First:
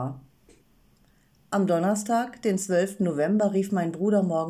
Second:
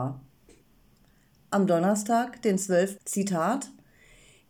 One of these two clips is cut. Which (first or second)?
second